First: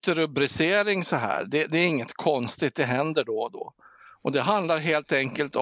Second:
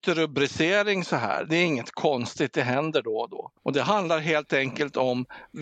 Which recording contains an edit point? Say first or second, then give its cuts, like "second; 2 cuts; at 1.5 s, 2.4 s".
second; 2 cuts; at 1.5 s, 3.6 s